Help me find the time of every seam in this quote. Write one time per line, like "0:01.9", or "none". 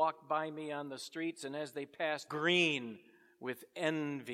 0:02.3